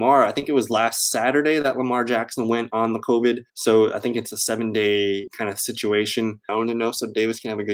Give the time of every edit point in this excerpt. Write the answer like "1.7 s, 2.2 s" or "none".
3.5 s, 6.5 s